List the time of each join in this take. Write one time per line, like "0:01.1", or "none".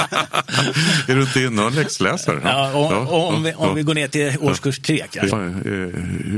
0:05.3